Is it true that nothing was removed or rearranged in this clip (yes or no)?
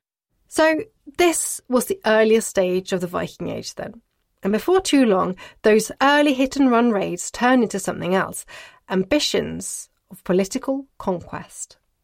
no